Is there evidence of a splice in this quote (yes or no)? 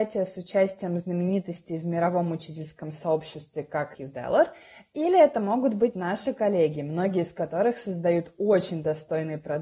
yes